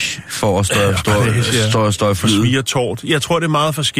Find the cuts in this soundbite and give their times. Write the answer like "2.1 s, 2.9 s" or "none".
none